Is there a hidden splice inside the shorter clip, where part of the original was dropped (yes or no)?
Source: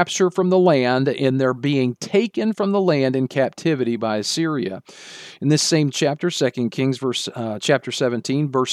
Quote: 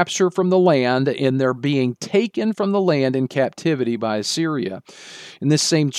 no